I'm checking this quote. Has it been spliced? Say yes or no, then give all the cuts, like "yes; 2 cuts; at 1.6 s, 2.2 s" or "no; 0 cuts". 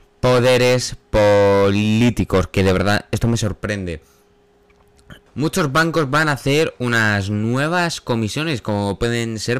yes; 1 cut; at 5.3 s